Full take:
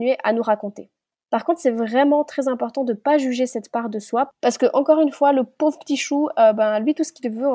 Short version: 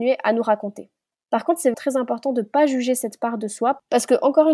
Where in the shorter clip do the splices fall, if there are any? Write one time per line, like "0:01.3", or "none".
0:01.7

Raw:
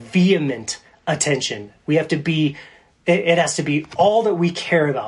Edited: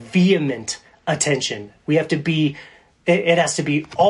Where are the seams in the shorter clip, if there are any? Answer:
none

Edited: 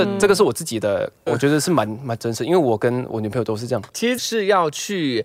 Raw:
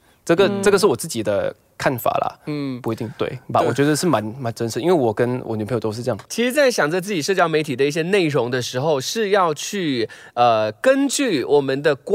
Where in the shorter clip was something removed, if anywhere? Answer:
0:01.3
0:04.2

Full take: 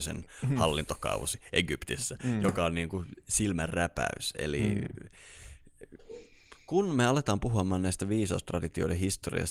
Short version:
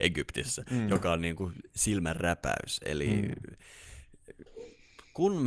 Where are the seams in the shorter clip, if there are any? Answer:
none

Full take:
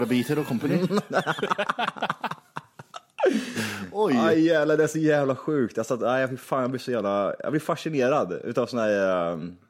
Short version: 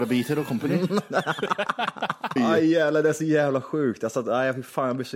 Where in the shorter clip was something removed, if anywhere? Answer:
0:02.4

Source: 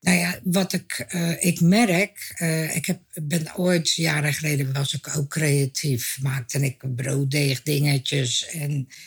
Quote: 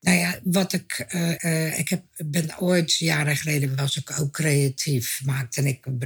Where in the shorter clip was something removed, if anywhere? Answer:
0:01.4

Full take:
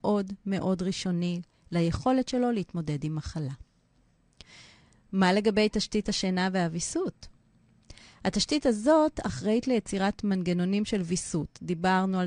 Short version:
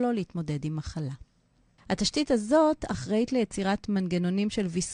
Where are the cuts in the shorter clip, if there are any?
0:01.8

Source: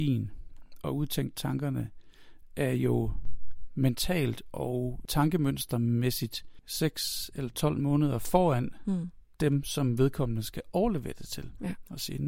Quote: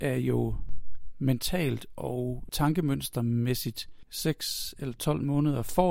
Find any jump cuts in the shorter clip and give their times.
none

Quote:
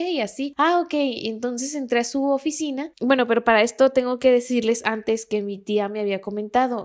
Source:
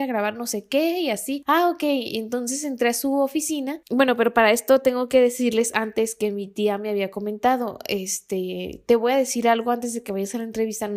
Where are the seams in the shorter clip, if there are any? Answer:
none

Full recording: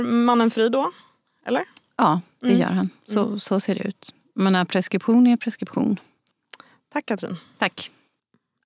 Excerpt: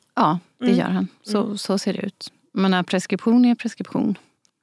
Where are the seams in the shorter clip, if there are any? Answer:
none

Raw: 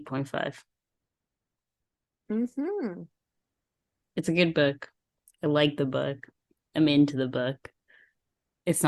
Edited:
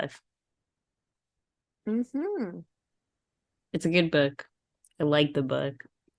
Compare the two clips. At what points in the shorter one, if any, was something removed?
none

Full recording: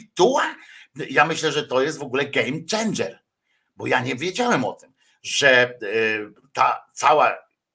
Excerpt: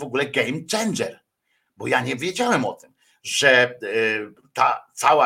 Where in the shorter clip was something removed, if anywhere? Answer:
none

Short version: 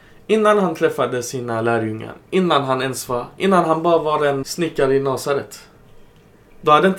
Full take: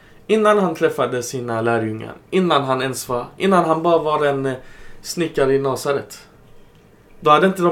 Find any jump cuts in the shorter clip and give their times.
0:04.4

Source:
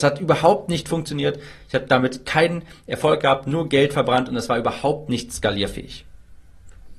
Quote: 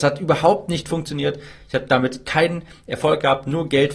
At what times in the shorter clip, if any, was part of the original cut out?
none

